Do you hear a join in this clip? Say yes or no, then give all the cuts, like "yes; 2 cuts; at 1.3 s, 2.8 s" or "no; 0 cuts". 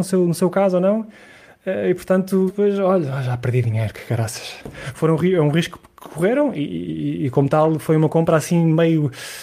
yes; 1 cut; at 2.5 s